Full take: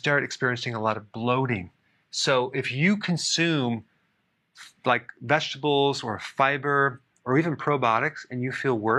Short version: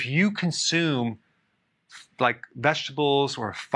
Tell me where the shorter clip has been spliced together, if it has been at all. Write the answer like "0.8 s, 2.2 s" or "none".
none